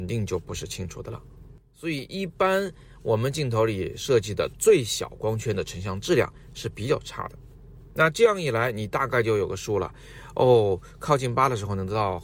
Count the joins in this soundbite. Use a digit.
0